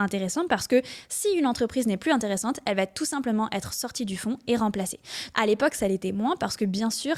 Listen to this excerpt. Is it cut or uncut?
cut